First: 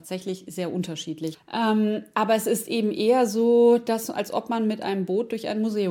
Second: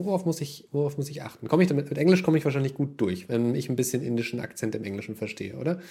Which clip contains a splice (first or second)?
first